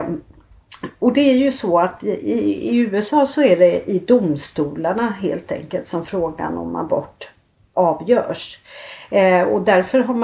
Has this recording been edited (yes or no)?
no